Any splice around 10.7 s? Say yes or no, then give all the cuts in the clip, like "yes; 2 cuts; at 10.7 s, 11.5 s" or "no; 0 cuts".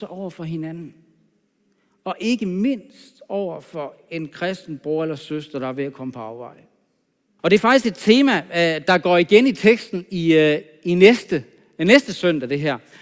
no; 1 cut; at 7.4 s